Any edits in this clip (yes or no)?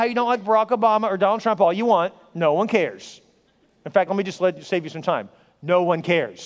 no